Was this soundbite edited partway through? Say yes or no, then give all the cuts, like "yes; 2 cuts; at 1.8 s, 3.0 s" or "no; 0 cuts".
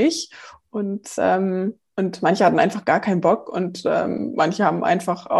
no; 0 cuts